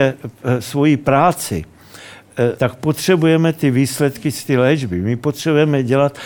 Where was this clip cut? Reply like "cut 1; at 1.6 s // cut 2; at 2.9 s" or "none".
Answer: cut 1; at 2.6 s

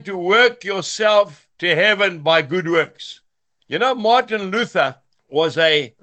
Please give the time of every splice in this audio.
cut 1; at 3.6 s

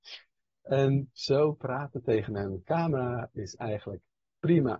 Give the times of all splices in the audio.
none

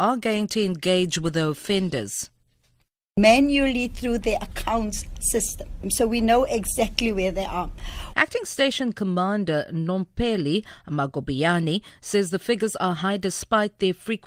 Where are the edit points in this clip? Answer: cut 1; at 5.8 s // cut 2; at 8.1 s

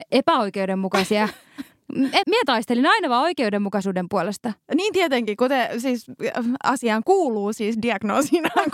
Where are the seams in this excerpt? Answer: cut 1; at 2.2 s

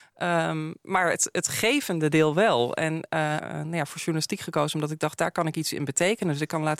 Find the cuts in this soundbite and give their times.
cut 1; at 3.4 s

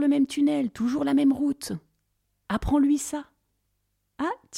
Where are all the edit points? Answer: cut 1; at 2.5 s

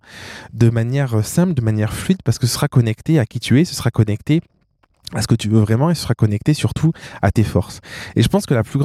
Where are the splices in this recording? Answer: none

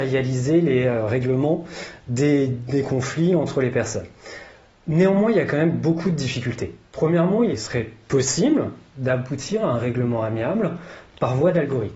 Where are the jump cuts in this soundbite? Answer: cut 1; at 7.5 s

